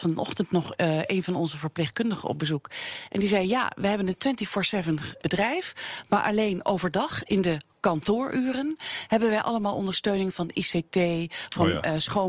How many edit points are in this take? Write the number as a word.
one